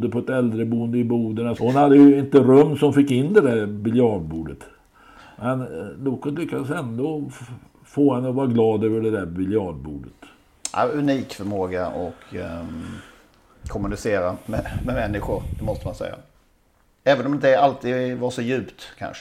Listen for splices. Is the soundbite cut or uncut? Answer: cut